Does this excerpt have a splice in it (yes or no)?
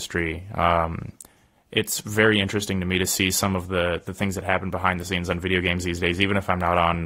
no